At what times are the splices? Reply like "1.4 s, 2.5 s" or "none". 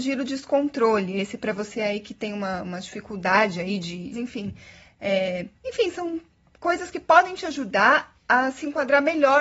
4.1 s, 5.6 s